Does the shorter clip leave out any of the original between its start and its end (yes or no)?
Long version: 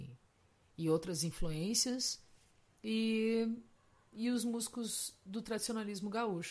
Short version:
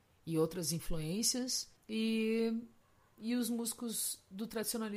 yes